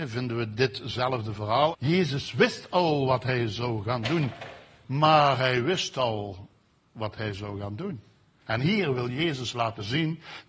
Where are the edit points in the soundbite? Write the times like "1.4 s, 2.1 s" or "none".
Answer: 1.7 s, 4.8 s, 8.4 s